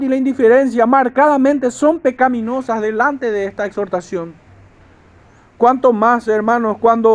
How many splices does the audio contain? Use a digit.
1